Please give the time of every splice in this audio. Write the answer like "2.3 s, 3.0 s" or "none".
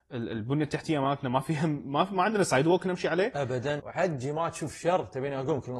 3.8 s